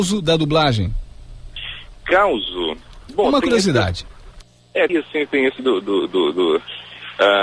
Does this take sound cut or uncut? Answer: cut